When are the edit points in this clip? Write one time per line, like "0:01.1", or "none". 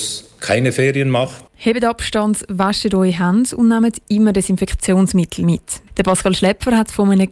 0:01.5
0:05.9